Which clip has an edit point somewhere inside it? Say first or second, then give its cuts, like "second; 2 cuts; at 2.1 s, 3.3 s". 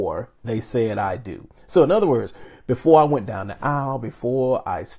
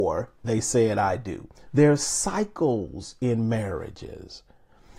second; 1 cut; at 1.7 s